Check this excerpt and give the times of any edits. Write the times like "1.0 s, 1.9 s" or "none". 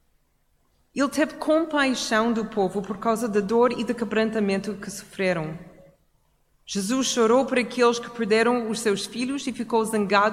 none